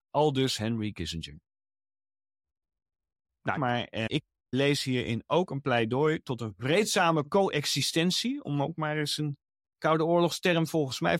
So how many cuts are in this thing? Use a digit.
1